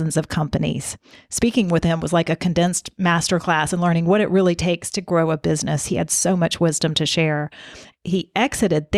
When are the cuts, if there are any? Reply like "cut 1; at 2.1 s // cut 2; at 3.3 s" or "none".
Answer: cut 1; at 7.9 s